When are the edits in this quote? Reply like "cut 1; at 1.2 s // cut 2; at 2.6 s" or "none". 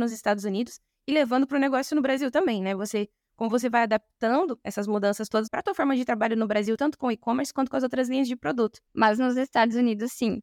cut 1; at 5.5 s // cut 2; at 8.9 s